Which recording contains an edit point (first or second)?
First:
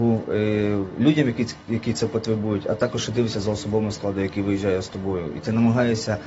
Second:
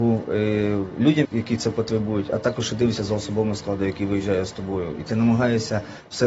second